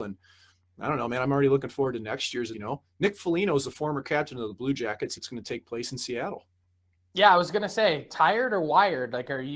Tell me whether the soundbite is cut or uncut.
cut